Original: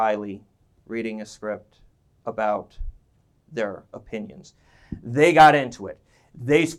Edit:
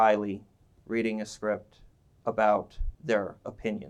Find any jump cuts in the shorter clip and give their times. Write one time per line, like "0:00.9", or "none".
0:02.9